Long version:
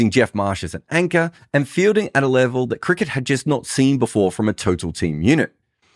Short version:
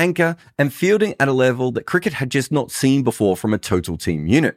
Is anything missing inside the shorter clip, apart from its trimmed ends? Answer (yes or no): no